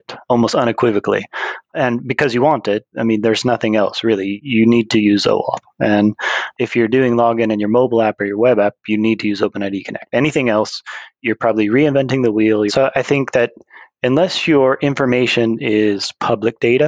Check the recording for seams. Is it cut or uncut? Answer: cut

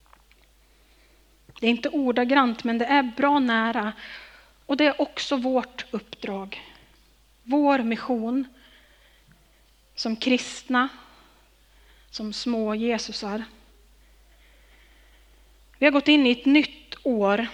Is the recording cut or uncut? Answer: uncut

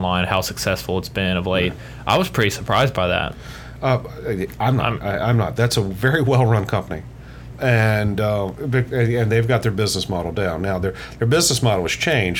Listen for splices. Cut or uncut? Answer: cut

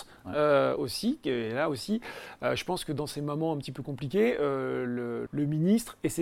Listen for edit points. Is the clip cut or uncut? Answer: cut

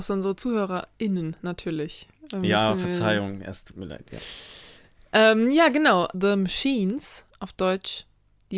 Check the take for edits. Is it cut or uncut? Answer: cut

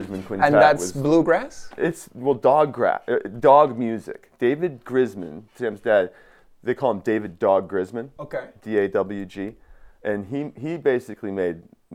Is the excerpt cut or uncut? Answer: uncut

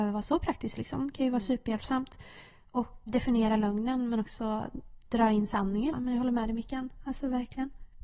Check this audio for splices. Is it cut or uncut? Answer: cut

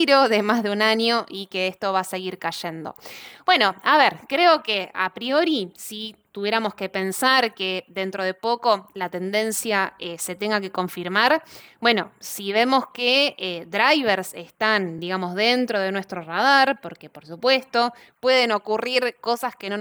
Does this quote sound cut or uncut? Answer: uncut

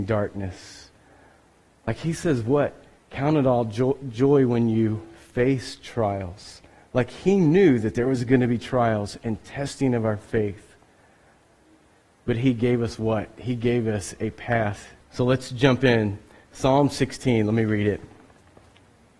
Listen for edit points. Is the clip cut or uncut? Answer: cut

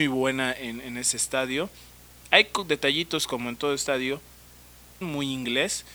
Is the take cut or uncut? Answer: cut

